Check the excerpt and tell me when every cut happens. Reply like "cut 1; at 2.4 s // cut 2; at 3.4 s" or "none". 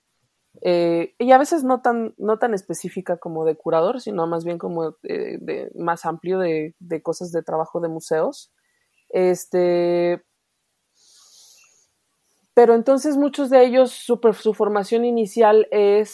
none